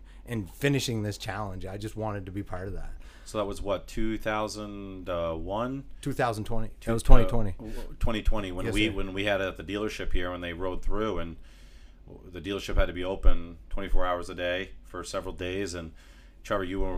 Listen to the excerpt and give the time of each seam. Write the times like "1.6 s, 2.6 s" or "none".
none